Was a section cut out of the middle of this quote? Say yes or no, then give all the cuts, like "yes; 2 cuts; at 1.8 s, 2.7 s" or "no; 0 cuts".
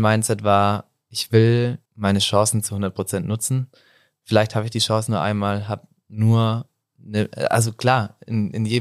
yes; 1 cut; at 1.9 s